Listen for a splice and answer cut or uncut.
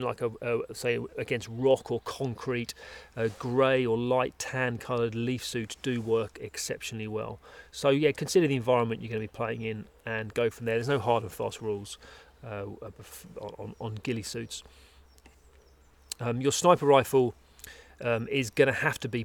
uncut